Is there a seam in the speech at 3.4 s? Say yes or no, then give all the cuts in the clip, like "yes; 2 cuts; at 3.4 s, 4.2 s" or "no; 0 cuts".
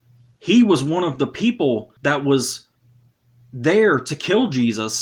no; 1 cut; at 2.0 s